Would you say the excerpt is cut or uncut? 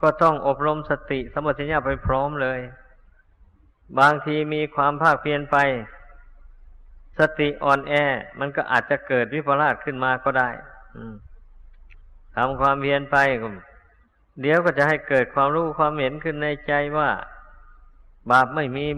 uncut